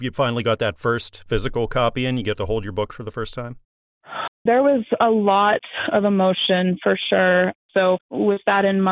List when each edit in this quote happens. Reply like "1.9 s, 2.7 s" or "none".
4.3 s, 7.7 s